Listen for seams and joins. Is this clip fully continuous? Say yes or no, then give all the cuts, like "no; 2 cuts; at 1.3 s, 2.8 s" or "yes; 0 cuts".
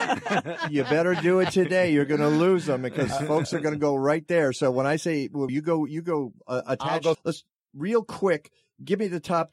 no; 2 cuts; at 5.5 s, 7.1 s